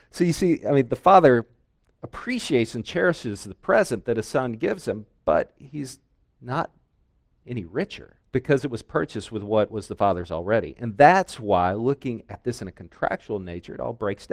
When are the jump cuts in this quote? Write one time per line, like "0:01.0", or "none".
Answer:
0:08.3